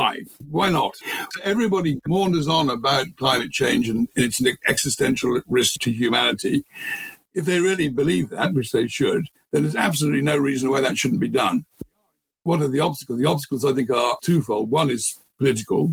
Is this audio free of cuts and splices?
yes; 0 cuts

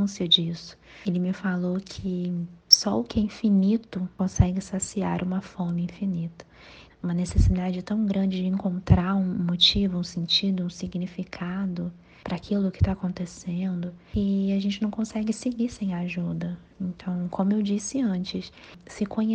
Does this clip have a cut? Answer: yes; 1 cut; at 6.9 s

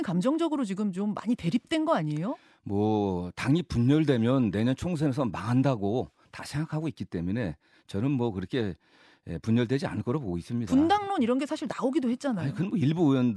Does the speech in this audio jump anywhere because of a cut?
no; 0 cuts

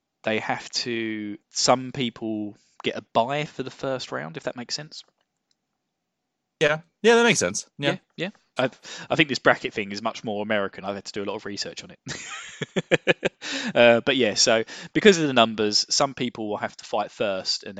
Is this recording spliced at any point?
yes; 2 cuts; at 1.4 s, 8.6 s

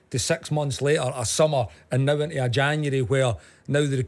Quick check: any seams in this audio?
no; 0 cuts

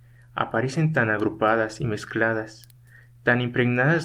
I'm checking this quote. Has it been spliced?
no; 0 cuts

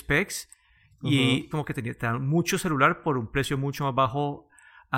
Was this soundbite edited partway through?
yes; 1 cut; at 1.5 s

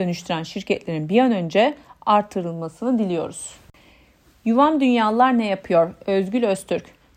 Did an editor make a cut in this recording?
no; 0 cuts

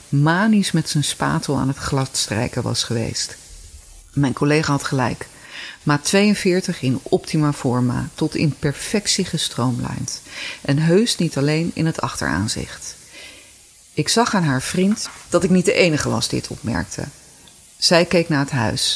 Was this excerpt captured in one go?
yes; 0 cuts

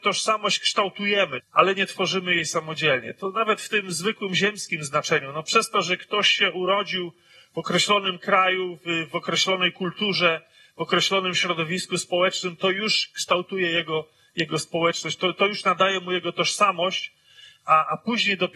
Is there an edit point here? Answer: yes; 1 cut; at 1.4 s

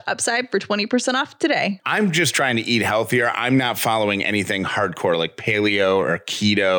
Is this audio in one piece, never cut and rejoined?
yes; 0 cuts

